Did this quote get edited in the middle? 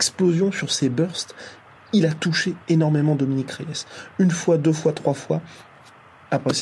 no; 0 cuts

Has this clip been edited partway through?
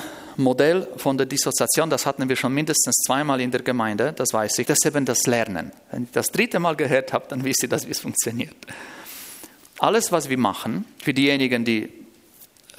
yes; 1 cut; at 4.6 s

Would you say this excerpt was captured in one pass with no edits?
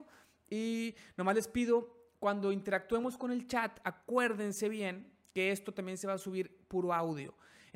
yes; 0 cuts

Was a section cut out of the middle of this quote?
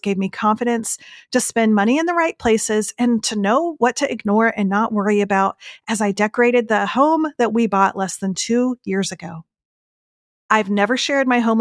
no; 0 cuts

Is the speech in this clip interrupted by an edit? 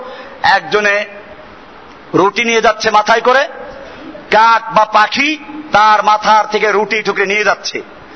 yes; 1 cut; at 7.0 s

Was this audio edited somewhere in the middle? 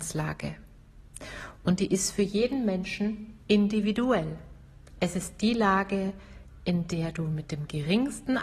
no; 0 cuts

